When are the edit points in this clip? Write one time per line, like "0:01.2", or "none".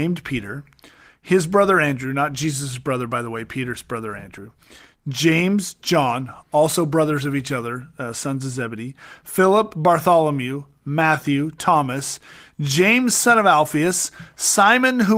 none